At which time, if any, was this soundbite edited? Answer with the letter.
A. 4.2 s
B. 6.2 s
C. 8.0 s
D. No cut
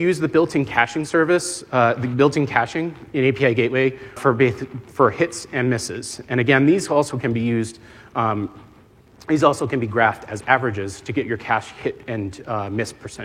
A